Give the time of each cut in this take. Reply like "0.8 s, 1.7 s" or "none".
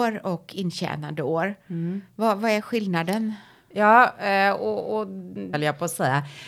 5.5 s